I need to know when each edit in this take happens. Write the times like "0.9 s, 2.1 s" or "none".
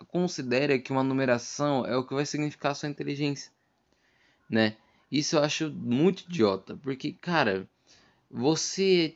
none